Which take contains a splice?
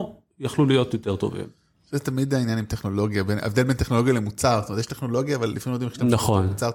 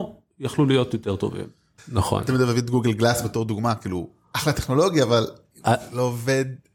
second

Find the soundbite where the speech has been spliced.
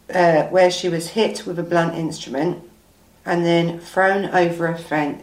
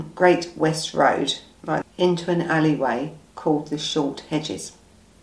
second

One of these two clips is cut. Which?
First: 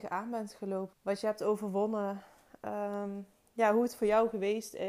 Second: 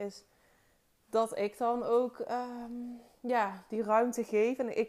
first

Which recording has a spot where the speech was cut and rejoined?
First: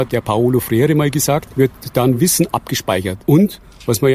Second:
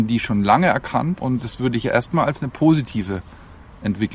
first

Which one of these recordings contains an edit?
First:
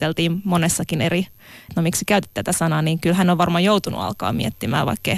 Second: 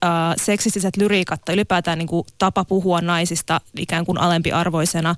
first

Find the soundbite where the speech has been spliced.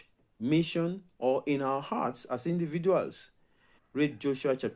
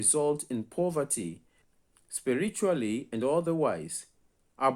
first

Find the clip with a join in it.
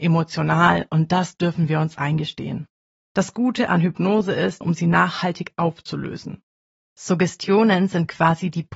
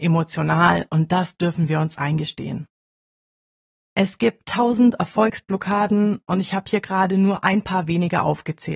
first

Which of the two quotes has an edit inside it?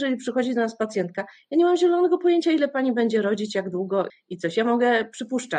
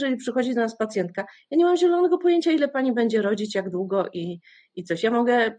first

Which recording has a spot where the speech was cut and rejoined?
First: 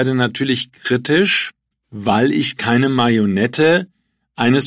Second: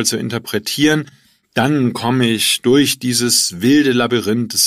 first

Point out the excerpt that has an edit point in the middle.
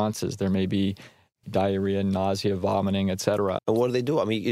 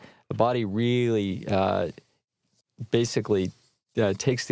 first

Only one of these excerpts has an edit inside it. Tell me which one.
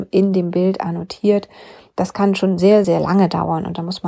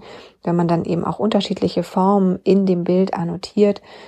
first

